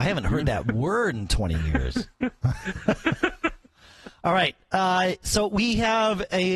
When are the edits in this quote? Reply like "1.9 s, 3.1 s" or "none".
none